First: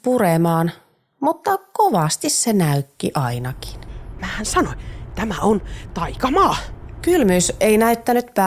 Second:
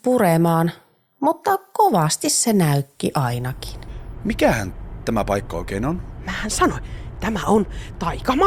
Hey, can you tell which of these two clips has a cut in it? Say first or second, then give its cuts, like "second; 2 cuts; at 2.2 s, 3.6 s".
first; 1 cut; at 4.2 s